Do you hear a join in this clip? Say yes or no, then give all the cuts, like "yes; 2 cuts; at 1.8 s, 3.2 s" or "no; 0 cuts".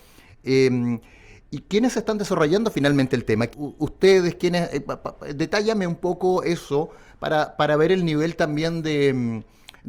yes; 1 cut; at 3.5 s